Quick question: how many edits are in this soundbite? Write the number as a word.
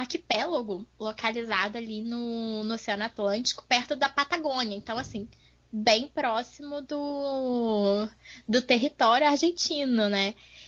zero